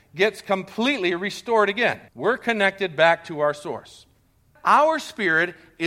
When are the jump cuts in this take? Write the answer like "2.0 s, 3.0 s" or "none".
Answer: 2.1 s, 4.6 s